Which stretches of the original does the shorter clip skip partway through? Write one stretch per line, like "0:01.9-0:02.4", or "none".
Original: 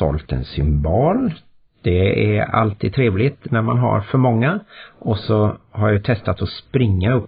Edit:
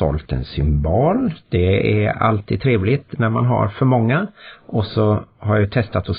0:01.4-0:01.7